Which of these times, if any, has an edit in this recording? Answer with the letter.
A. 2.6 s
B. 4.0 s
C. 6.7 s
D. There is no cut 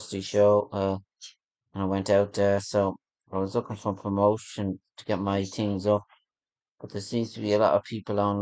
D